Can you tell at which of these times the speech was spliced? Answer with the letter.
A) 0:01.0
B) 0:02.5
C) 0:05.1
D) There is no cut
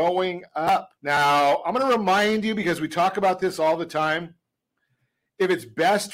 A